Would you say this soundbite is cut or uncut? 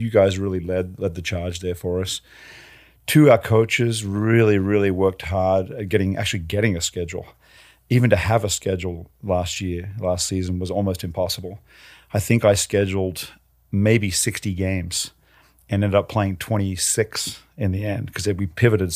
uncut